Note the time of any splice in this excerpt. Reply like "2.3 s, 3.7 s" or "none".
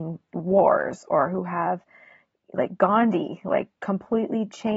none

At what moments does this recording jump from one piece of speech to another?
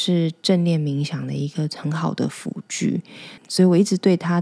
3.4 s

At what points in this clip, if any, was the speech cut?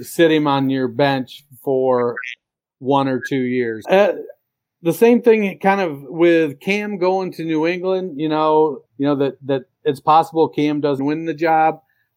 3.8 s, 8.9 s, 11.0 s

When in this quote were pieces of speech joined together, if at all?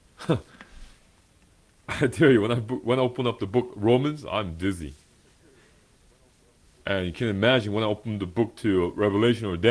none

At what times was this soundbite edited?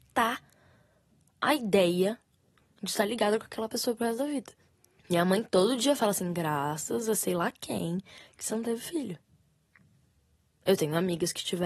5.0 s

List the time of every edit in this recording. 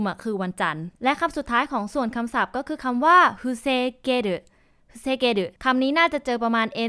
5.6 s

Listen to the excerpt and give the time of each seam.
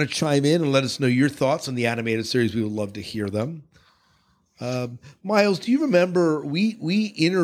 none

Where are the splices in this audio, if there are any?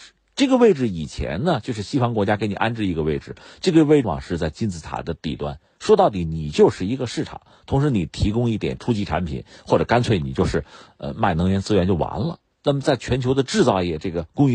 4.0 s, 12.5 s

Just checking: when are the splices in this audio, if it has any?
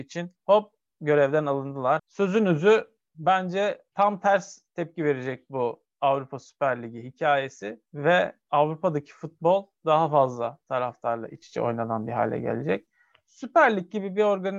2.0 s

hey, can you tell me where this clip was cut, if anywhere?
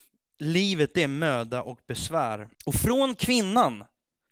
2.5 s

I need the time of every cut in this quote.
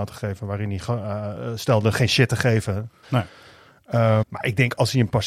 3.0 s, 4.2 s

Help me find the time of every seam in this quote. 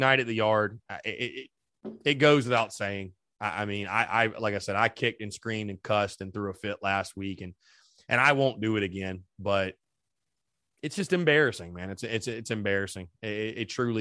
none

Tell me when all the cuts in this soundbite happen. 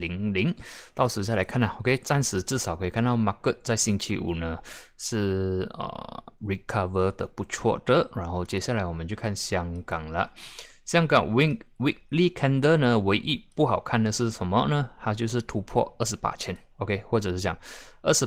9.2 s

